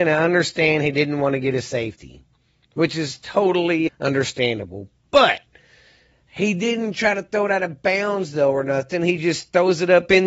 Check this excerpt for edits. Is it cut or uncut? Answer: cut